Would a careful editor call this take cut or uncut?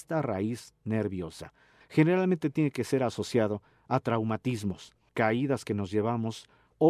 cut